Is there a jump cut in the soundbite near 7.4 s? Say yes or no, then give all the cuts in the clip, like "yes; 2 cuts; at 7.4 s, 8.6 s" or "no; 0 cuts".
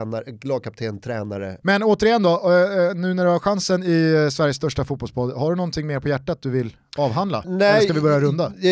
yes; 2 cuts; at 1.6 s, 7.4 s